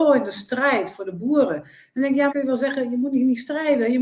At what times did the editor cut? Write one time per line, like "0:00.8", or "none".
0:02.3